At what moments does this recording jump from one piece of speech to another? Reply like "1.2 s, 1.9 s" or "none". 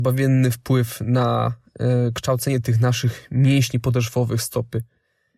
none